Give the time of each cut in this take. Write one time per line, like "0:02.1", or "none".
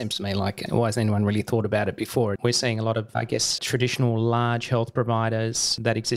0:02.4
0:03.6